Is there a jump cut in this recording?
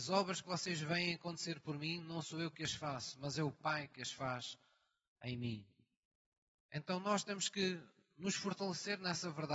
no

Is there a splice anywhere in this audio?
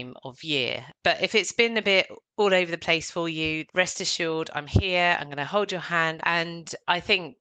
yes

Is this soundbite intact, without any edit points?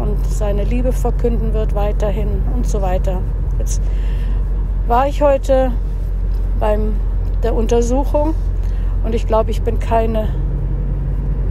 no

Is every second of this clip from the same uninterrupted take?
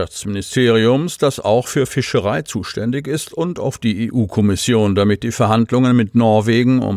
yes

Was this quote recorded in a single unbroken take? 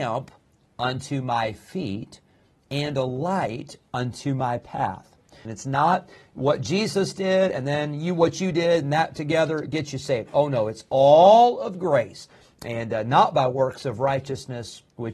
no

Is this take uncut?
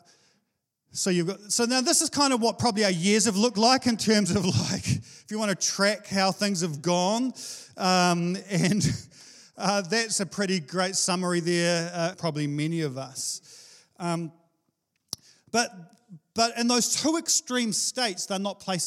no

